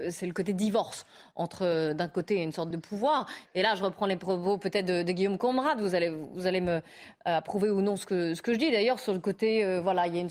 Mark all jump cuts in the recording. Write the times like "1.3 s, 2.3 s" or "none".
2.7 s